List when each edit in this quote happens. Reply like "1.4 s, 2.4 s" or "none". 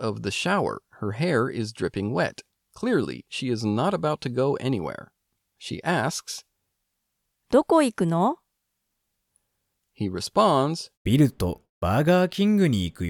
10.9 s